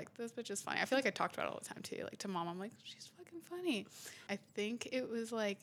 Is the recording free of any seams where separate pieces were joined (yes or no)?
no